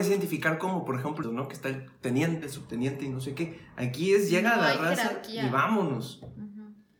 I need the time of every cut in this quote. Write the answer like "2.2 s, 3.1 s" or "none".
1.2 s, 2.4 s

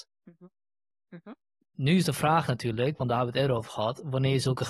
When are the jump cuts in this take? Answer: 0.9 s

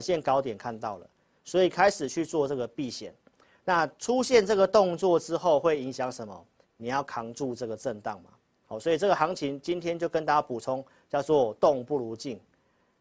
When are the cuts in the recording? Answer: 6.6 s

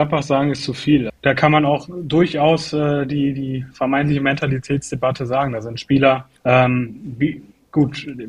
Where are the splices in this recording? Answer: 1.1 s, 6.4 s

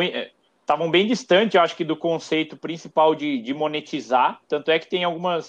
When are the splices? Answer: none

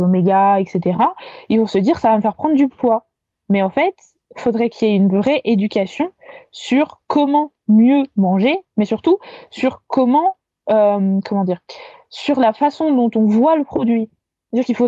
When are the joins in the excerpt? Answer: none

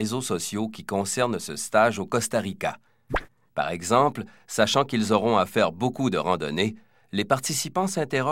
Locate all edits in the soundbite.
3.5 s

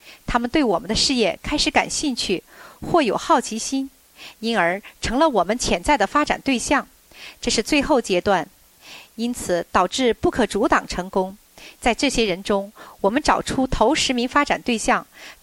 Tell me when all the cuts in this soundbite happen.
7.4 s, 11.8 s

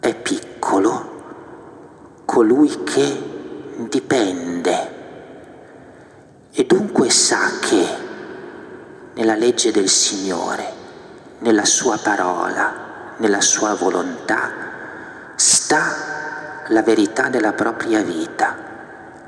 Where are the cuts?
none

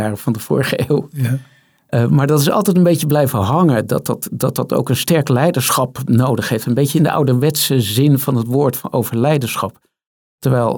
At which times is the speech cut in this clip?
none

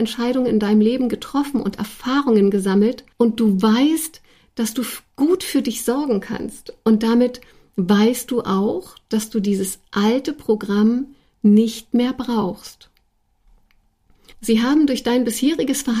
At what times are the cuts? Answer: 3.1 s, 14.3 s

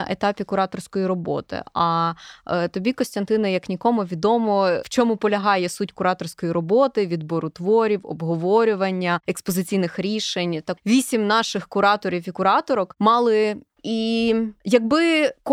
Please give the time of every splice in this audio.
10.8 s, 13.8 s

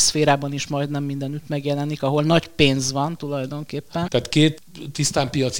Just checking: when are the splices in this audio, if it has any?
4.1 s

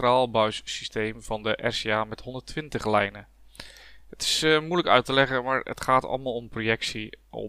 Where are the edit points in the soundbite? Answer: none

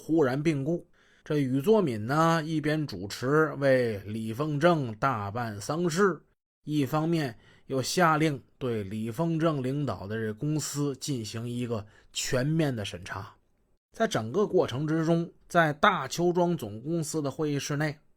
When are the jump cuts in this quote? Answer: 13.7 s, 15.4 s

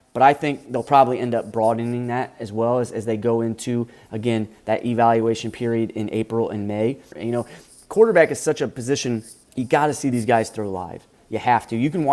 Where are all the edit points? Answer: 7.1 s, 9.4 s

